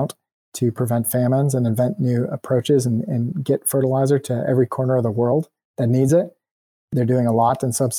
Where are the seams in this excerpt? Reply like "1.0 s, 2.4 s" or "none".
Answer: none